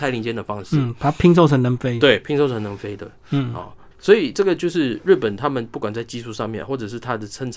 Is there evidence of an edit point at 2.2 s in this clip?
no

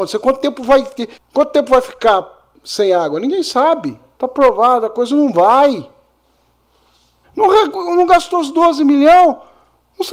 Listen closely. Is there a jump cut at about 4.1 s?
yes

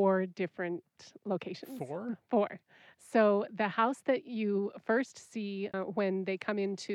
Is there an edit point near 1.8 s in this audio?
no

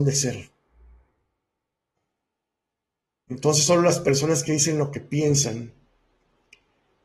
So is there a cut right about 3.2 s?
no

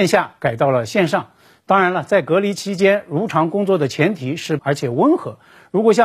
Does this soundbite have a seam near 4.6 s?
yes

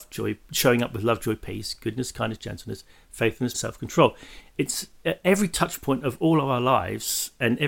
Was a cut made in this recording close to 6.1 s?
no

